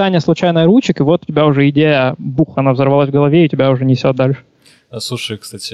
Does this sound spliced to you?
no; 0 cuts

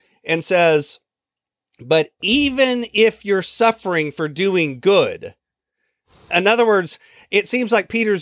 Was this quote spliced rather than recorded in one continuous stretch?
no; 0 cuts

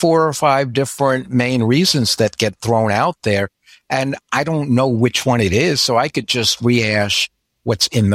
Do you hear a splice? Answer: no; 0 cuts

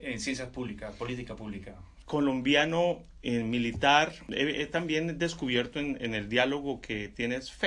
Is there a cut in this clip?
no; 0 cuts

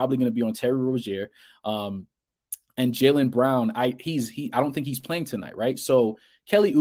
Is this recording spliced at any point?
no; 0 cuts

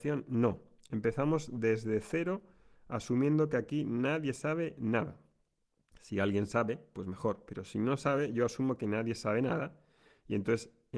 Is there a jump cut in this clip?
no; 0 cuts

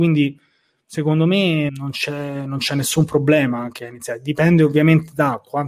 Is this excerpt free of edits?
no; 1 cut; at 1.7 s

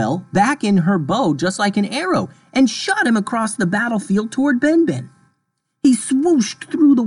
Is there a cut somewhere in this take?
no; 0 cuts

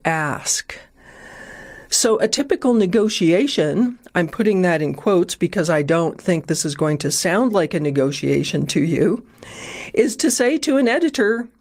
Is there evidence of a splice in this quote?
no; 0 cuts

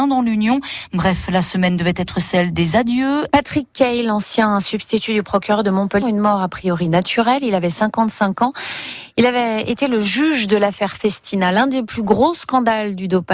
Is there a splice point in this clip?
yes; 2 cuts; at 3.3 s, 6.0 s

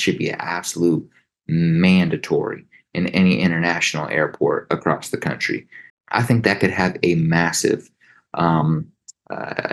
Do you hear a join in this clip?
yes; 1 cut; at 5.9 s

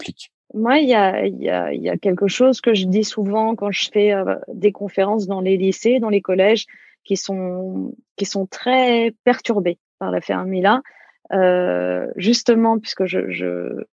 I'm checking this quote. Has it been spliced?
no; 0 cuts

